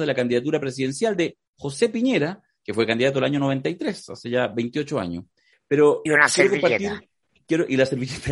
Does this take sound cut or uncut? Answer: cut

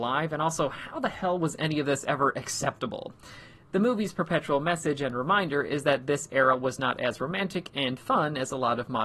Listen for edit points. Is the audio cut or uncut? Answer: uncut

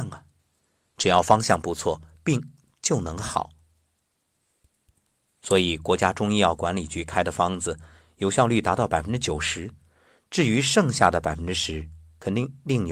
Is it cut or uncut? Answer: uncut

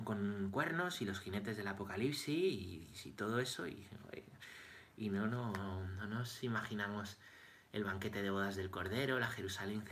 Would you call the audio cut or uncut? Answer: uncut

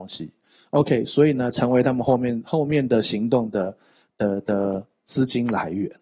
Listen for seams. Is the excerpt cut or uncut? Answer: uncut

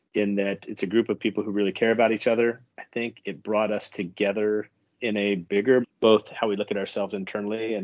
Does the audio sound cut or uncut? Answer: cut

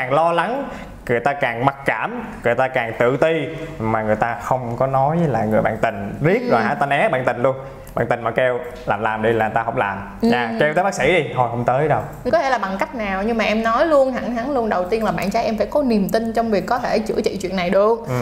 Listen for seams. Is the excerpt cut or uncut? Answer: cut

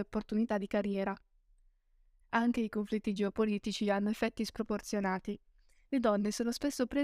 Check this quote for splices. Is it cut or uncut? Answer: cut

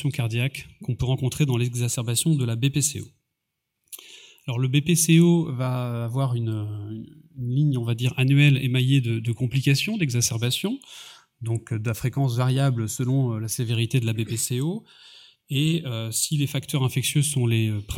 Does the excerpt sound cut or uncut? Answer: uncut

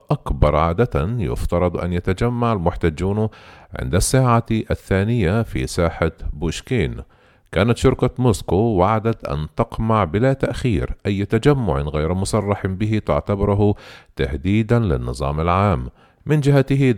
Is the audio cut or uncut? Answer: uncut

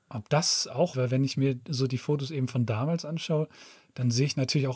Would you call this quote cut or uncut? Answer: cut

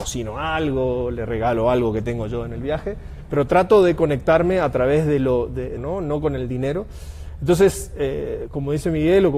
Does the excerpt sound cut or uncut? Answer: cut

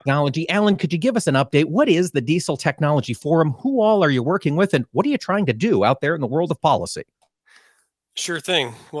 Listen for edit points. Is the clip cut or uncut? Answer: uncut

